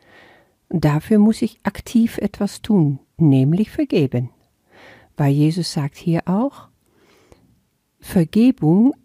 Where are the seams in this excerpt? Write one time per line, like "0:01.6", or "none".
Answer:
none